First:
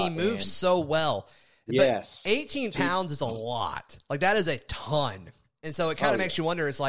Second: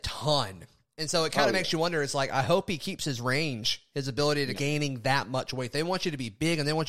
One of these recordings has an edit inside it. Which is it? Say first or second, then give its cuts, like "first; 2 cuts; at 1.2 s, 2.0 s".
second; 1 cut; at 4.6 s